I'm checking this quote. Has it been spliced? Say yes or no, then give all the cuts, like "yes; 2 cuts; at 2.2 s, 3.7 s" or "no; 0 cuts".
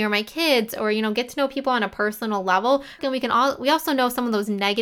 yes; 1 cut; at 3.0 s